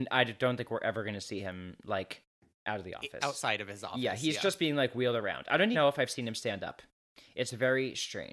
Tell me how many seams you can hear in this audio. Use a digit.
1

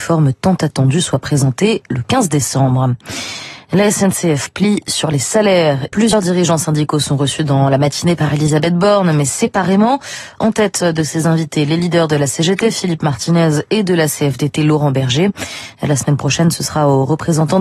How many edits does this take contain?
1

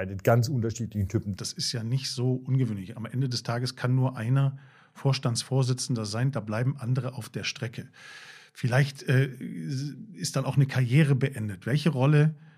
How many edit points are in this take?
1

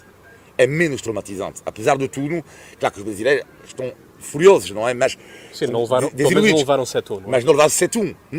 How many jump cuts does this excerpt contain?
0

